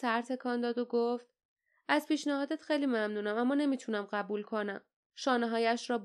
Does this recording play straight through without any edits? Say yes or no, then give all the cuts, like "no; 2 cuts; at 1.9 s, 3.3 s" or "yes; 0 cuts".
no; 1 cut; at 5.1 s